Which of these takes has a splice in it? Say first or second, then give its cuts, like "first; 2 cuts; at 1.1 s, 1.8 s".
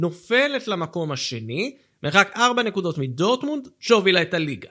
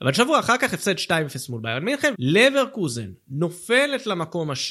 second; 1 cut; at 2.1 s